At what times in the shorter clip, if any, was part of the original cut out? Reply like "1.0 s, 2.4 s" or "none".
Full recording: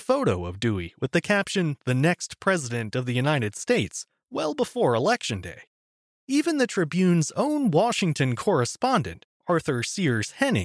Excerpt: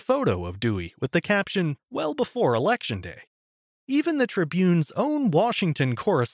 1.8 s